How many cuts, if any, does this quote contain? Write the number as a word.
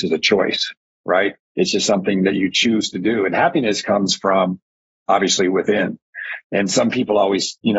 one